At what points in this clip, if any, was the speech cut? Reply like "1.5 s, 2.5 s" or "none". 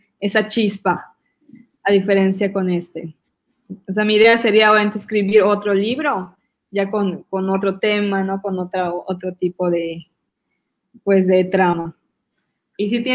none